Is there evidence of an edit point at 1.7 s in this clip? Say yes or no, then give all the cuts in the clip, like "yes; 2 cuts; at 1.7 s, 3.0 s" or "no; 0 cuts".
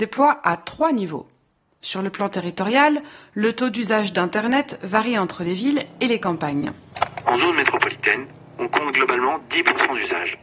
no; 0 cuts